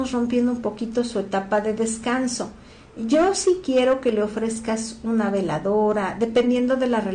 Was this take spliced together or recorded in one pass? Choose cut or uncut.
uncut